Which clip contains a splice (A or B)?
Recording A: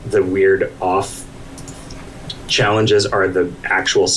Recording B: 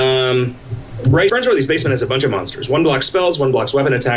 B